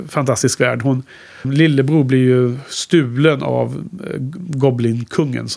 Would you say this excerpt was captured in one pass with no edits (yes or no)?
no